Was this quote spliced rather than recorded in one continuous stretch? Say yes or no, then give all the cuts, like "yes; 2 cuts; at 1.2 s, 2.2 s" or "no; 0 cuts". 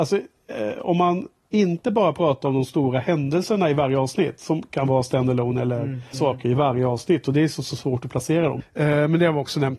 yes; 2 cuts; at 6.1 s, 8.6 s